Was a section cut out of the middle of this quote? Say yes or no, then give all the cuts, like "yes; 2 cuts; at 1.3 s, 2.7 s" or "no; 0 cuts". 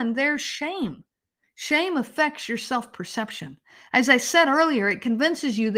yes; 1 cut; at 1.4 s